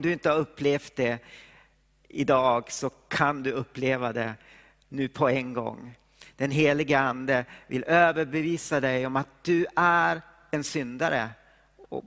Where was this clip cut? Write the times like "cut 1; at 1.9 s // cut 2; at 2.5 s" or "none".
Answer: none